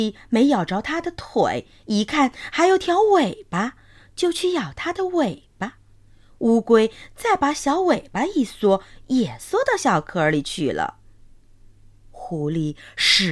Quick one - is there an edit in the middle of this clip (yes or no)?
no